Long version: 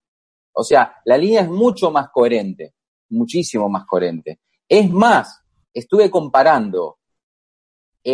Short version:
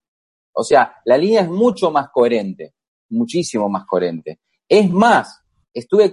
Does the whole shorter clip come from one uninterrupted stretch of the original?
yes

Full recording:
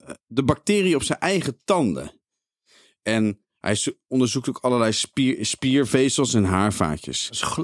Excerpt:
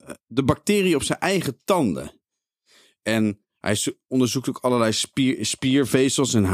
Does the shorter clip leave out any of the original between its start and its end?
no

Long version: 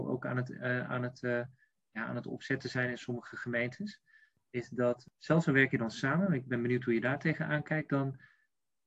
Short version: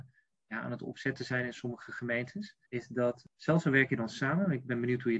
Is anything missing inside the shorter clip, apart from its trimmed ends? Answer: yes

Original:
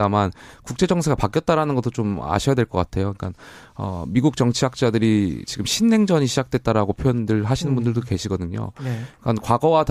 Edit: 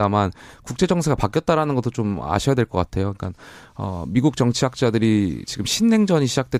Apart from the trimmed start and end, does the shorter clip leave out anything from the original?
no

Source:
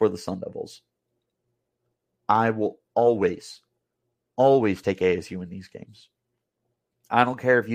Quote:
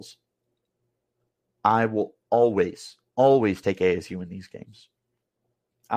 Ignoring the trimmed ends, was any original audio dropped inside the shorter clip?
yes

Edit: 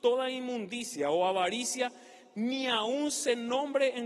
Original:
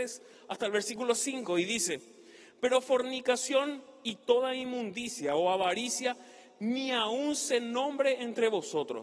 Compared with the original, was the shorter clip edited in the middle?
no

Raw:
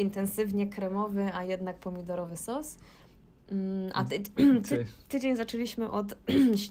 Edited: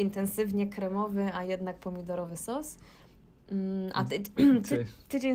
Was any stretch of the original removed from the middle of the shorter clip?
no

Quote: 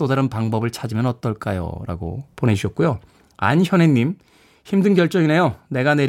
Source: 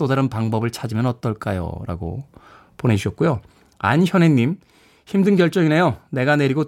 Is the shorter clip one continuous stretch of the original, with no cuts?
no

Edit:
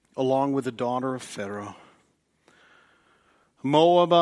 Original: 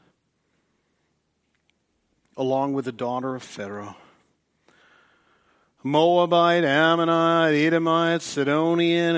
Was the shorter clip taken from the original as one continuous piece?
yes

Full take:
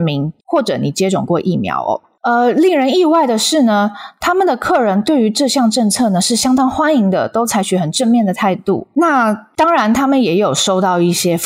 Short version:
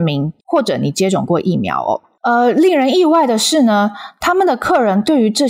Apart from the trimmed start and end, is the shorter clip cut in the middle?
no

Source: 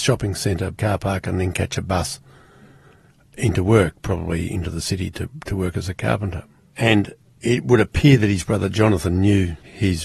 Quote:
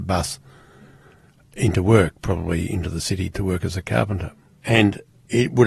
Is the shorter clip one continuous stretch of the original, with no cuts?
no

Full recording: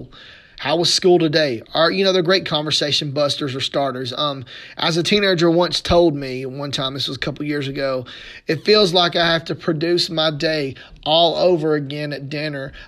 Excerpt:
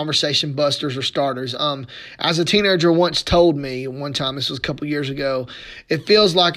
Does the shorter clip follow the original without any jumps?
yes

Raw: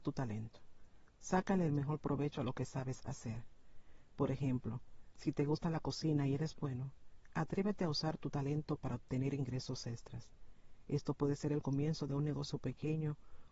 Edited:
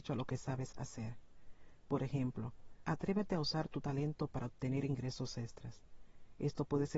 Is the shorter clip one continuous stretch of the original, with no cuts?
no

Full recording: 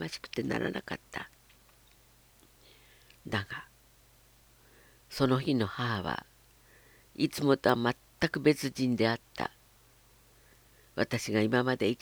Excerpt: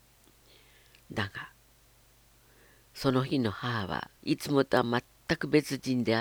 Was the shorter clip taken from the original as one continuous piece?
no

